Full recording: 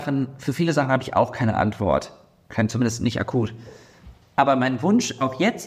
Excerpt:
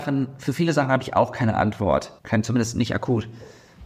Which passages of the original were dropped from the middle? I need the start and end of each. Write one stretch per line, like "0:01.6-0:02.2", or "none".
0:02.2-0:02.4